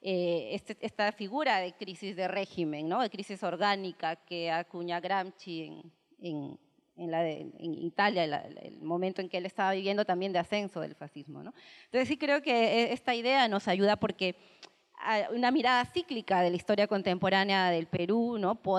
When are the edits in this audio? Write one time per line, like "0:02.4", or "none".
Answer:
none